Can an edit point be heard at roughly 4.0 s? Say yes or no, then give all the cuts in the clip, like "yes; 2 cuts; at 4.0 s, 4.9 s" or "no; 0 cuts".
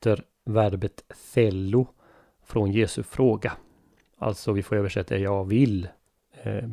no; 0 cuts